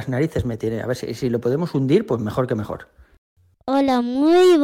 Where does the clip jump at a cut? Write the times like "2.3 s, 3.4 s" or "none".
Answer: 3.5 s